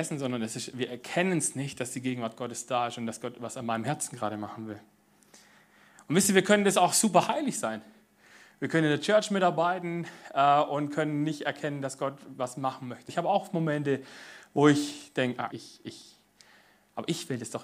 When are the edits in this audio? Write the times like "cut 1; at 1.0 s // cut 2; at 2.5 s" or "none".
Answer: cut 1; at 13.1 s // cut 2; at 15.5 s